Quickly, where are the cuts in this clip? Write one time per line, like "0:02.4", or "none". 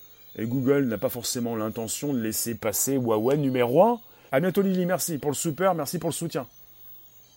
0:04.3